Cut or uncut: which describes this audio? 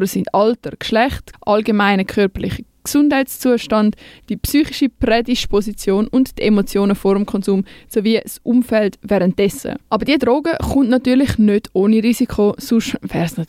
cut